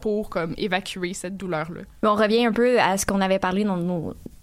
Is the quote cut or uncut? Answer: uncut